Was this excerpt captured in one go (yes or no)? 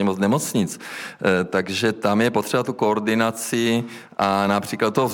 yes